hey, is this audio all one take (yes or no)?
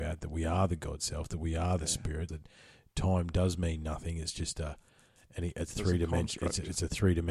no